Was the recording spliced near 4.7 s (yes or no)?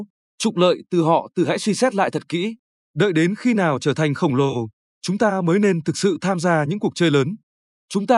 no